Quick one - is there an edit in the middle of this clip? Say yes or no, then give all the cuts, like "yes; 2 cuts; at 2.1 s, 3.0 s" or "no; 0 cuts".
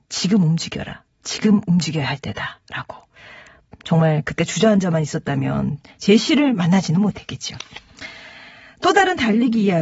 no; 0 cuts